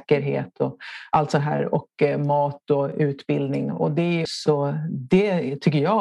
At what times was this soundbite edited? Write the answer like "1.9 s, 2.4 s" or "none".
4.3 s